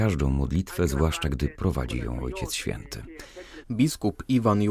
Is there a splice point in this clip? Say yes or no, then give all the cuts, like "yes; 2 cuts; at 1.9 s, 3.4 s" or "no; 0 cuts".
yes; 1 cut; at 3.6 s